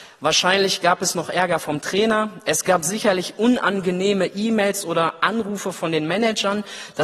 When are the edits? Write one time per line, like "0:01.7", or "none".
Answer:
none